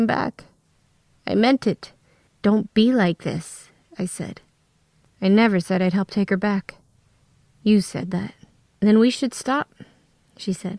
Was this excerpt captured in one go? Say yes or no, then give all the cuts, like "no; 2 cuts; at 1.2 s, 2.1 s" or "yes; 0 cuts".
no; 3 cuts; at 2.3 s, 5.0 s, 8.7 s